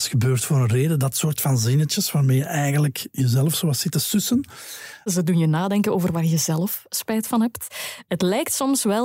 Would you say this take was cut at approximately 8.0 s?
no; 1 cut; at 5.1 s

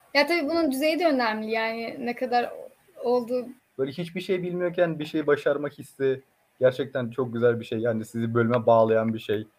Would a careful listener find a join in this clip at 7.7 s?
no; 1 cut; at 3.6 s

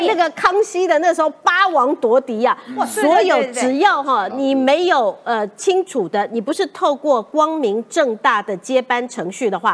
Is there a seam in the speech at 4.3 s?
yes; 1 cut; at 4.3 s

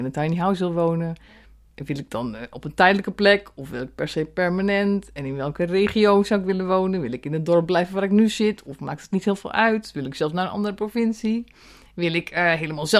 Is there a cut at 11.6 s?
no; 0 cuts

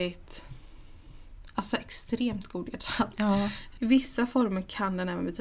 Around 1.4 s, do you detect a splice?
no; 1 cut; at 3.8 s

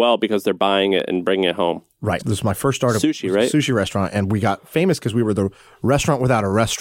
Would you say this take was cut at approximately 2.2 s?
yes; 1 cut; at 2.2 s

